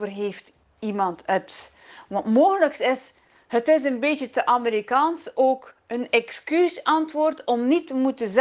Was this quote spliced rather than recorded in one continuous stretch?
no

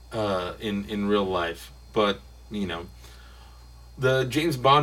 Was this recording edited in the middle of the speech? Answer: no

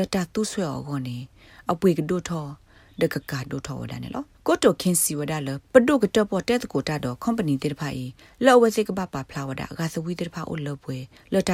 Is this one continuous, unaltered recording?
no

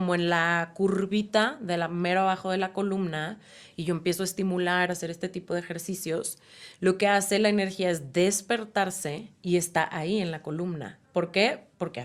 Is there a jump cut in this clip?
yes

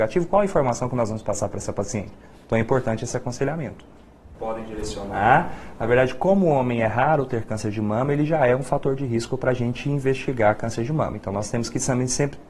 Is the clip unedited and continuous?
no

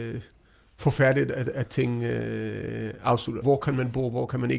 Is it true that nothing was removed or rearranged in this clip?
no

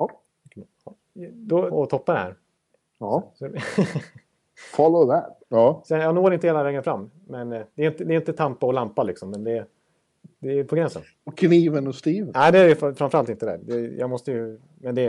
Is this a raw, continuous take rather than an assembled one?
no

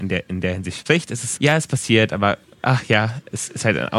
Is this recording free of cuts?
no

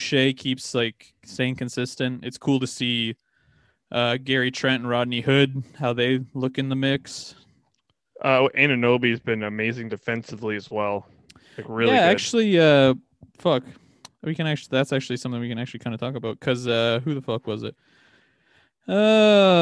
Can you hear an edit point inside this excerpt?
no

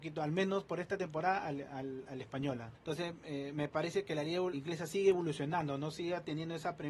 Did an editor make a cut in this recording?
yes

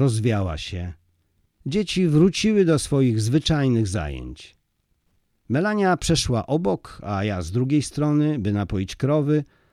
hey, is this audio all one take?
yes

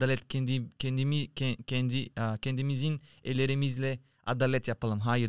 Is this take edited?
no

